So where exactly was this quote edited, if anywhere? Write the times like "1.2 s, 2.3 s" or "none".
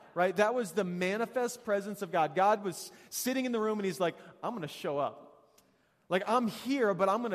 none